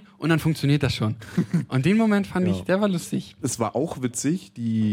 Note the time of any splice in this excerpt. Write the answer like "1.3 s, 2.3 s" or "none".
3.4 s